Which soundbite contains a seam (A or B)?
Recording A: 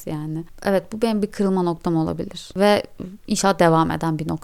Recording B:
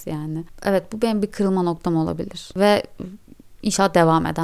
A